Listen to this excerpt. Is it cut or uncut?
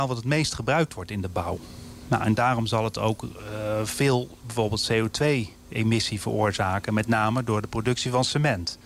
uncut